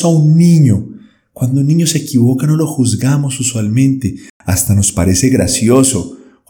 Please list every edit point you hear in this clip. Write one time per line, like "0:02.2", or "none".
none